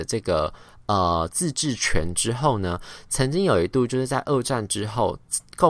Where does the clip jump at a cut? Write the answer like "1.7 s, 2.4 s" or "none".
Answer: none